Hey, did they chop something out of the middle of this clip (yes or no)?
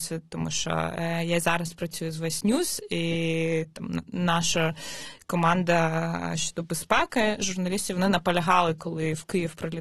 no